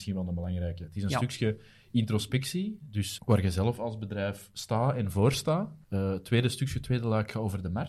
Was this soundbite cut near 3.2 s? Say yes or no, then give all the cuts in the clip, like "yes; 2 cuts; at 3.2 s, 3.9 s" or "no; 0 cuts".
yes; 2 cuts; at 3.2 s, 5.8 s